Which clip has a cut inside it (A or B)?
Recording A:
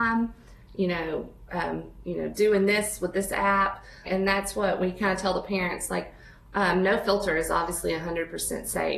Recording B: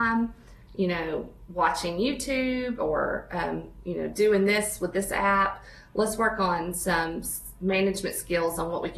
A